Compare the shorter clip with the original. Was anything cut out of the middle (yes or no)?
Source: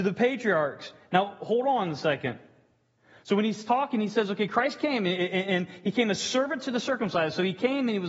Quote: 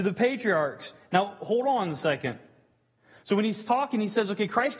no